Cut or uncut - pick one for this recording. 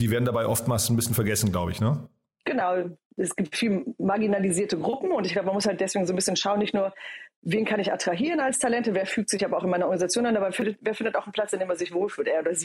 uncut